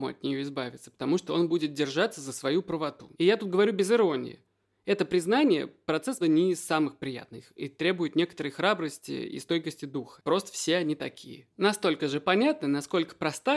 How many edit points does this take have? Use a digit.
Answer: 3